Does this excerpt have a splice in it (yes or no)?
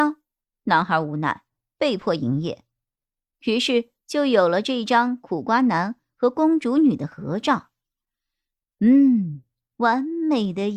no